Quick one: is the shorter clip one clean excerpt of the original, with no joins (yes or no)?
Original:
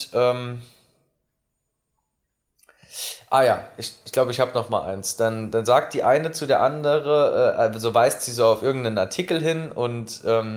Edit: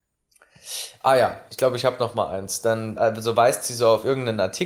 no